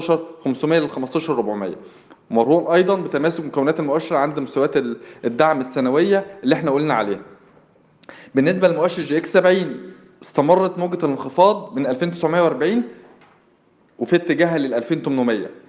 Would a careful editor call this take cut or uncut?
uncut